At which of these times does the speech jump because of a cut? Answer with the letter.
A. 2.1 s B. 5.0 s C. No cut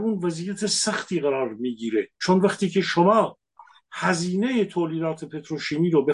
A